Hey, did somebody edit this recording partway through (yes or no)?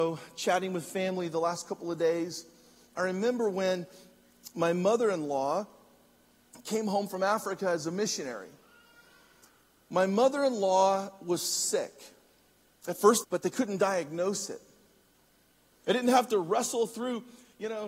yes